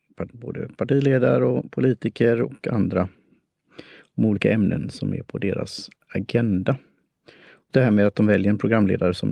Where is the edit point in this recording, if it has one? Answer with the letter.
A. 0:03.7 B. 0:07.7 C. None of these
B